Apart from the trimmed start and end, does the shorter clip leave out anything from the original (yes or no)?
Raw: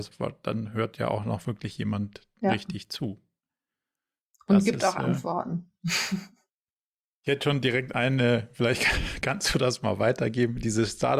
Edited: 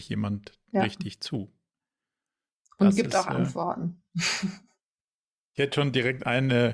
no